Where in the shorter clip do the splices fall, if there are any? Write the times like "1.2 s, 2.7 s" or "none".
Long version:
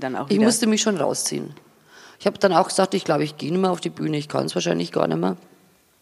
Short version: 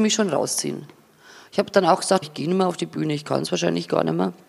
2.2 s